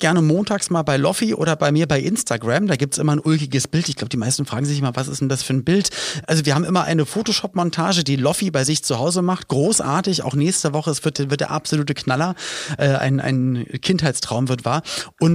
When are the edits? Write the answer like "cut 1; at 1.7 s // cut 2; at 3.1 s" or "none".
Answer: none